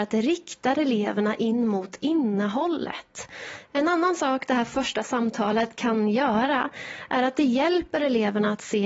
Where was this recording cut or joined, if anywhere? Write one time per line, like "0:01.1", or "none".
0:03.6